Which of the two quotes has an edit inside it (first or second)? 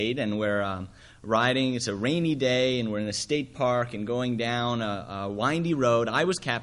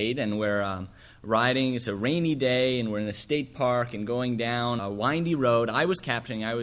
second